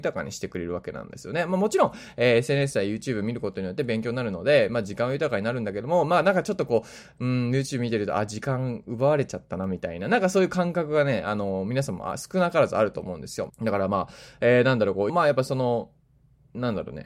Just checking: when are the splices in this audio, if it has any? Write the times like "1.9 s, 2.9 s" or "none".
13.5 s, 15.1 s